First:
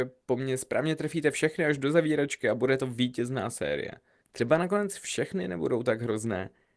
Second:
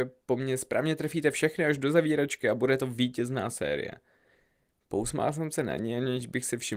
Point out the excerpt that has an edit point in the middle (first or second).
first